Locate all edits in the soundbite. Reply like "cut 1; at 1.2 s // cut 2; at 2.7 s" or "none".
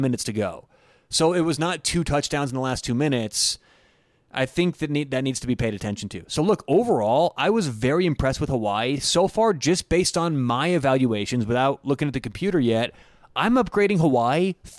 none